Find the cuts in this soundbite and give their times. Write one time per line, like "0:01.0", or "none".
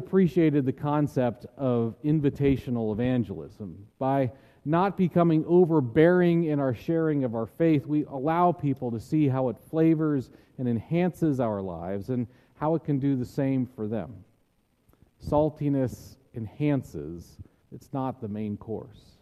0:17.6